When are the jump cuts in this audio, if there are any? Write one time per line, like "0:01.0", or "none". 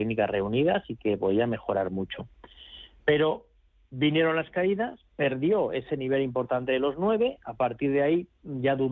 none